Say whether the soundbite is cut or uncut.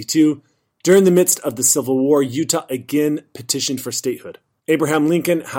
cut